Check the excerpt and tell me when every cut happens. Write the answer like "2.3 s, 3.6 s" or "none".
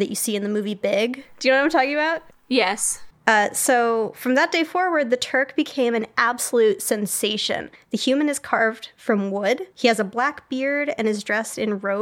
3.1 s, 7.8 s, 9.7 s

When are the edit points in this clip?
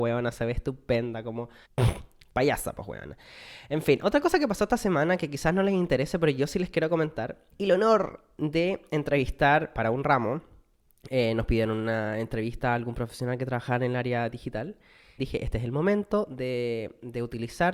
1.6 s, 7.5 s, 15.2 s

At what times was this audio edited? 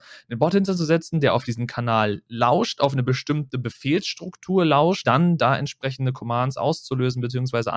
5.0 s

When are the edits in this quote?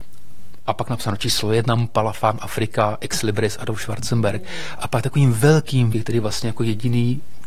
4.8 s, 5.9 s

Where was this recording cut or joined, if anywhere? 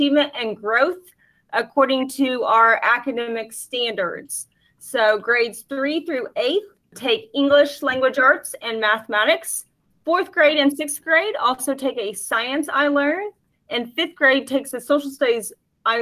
none

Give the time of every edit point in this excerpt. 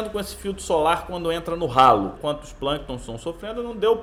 2.2 s

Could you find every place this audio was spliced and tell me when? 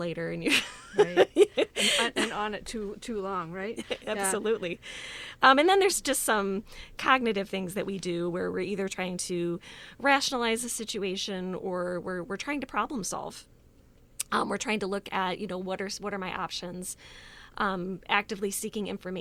none

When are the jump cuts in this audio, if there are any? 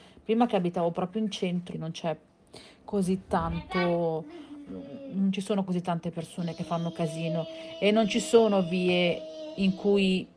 1.7 s

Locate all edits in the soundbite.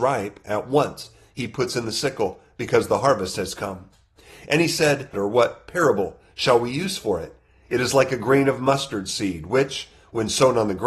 5.1 s

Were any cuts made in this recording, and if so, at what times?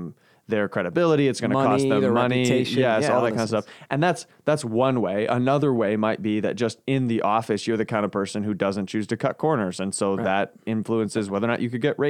none

